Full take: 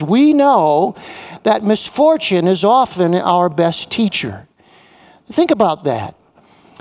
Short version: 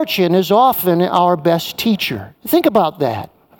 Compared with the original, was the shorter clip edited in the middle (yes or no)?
yes